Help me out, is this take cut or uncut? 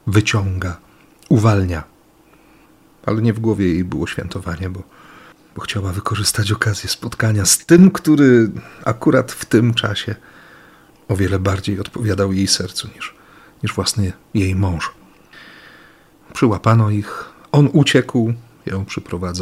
uncut